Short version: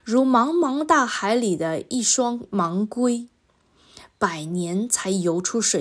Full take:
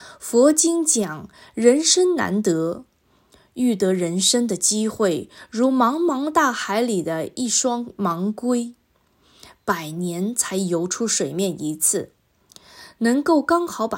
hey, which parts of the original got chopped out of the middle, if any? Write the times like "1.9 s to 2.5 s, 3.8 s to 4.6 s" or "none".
none